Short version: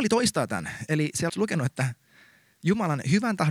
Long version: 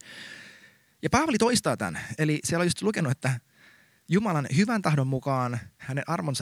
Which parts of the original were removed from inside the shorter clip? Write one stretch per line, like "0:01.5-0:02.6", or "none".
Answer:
0:02.6-0:02.7